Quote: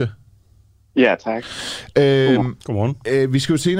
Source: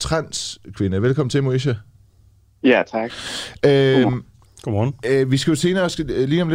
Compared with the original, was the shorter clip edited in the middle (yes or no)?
yes